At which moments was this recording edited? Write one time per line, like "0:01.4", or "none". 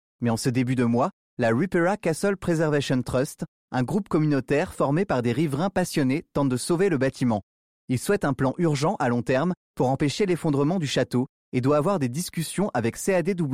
none